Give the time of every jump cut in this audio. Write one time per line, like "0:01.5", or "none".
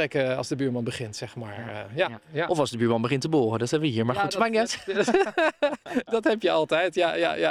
none